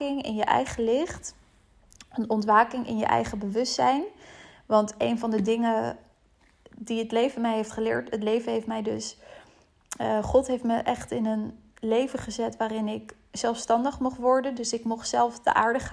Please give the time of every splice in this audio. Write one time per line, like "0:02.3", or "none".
none